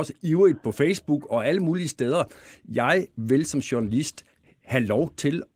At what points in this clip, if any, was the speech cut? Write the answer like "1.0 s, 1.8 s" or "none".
none